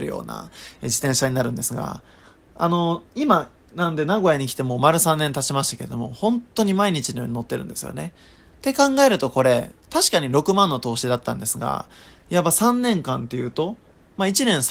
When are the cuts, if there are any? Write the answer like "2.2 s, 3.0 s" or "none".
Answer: none